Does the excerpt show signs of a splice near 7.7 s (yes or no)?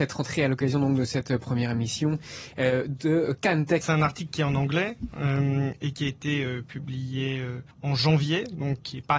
yes